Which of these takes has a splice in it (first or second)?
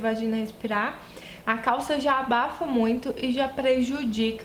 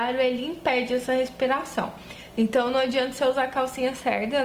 first